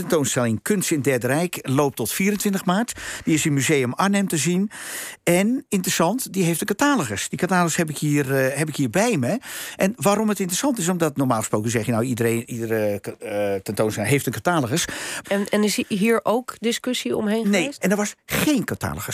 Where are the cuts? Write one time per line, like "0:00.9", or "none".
0:15.2
0:17.8